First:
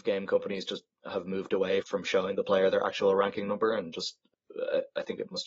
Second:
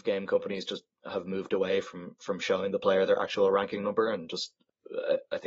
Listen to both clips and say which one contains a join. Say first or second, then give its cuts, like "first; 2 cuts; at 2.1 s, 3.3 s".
first; 1 cut; at 1.8 s